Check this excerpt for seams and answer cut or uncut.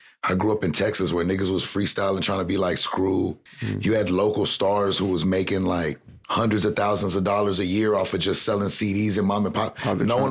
cut